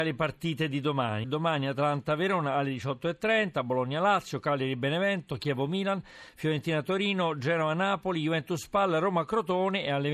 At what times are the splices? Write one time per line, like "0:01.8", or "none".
0:01.2